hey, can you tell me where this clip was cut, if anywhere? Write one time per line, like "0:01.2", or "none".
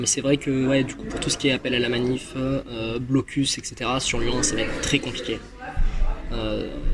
none